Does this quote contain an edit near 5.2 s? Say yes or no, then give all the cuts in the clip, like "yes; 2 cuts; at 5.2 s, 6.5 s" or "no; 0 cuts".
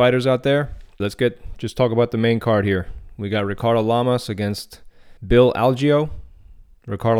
yes; 2 cuts; at 1.0 s, 5.2 s